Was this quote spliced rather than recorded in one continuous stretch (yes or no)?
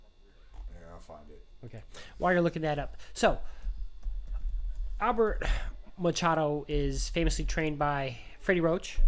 no